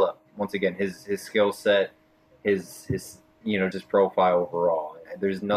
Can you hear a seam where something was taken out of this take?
yes; 1 cut; at 3.7 s

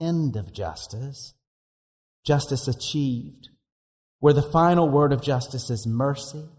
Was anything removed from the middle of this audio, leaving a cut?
no; 0 cuts

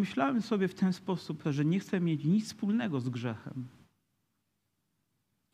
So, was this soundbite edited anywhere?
yes; 1 cut; at 1.4 s

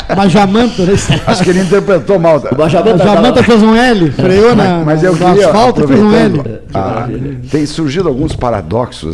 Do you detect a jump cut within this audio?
no; 0 cuts

